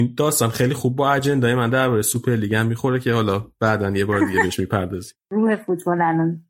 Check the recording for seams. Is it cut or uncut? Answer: cut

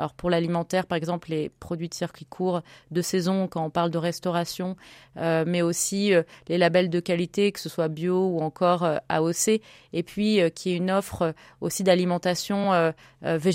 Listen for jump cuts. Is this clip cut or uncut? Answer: uncut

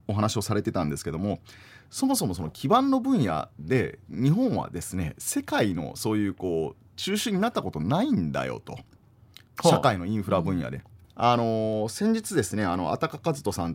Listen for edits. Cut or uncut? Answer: cut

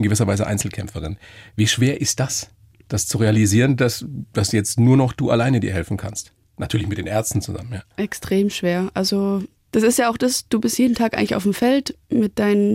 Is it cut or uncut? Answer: uncut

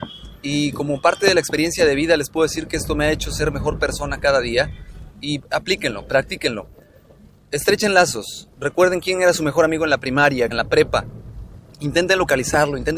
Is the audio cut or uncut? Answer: cut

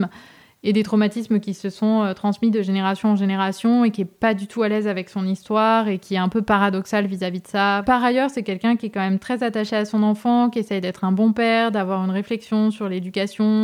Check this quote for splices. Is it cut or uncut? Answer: cut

